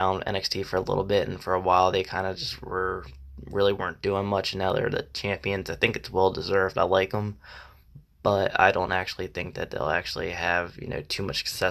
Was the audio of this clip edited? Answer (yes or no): no